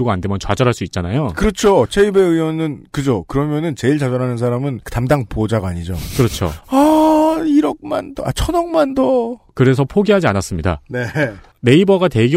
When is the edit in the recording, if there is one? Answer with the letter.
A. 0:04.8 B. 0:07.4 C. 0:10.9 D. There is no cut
A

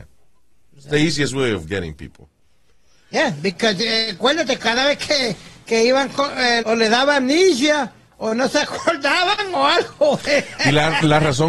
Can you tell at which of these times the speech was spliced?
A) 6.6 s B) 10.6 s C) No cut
A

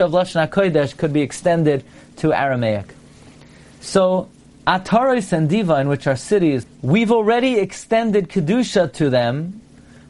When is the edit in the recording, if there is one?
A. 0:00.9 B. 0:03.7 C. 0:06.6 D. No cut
C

